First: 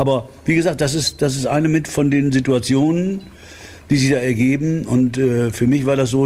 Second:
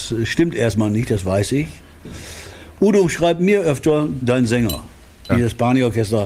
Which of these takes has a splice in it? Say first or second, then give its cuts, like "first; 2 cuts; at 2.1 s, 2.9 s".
second; 2 cuts; at 4.2 s, 5.3 s